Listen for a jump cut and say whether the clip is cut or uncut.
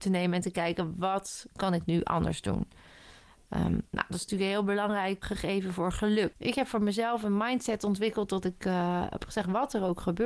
cut